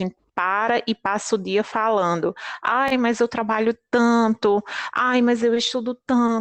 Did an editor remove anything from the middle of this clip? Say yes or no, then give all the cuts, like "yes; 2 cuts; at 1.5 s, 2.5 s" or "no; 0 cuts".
no; 0 cuts